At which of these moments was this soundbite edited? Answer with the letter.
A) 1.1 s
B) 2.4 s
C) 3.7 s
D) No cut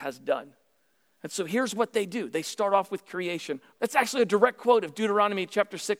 C